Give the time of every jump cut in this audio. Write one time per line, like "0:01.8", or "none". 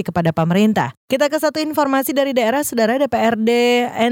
0:01.0